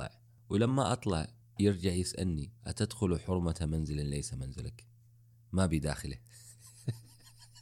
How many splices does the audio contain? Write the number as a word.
one